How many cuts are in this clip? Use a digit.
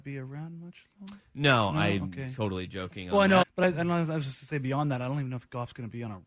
1